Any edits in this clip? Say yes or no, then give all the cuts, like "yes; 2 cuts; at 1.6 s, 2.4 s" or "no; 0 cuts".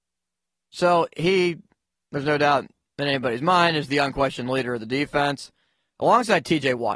no; 0 cuts